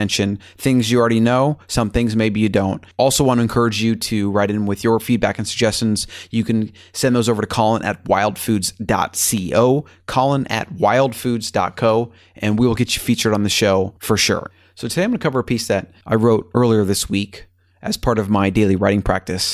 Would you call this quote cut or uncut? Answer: uncut